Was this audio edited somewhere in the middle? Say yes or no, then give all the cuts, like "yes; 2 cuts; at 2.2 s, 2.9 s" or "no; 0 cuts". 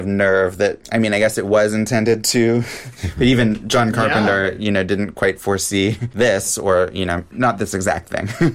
no; 0 cuts